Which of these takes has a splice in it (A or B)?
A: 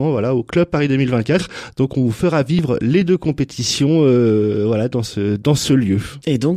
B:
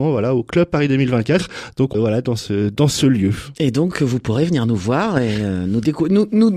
B